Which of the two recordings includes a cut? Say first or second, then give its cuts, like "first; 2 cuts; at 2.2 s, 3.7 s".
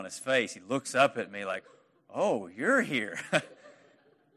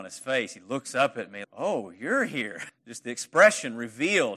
second; 2 cuts; at 1.4 s, 2.7 s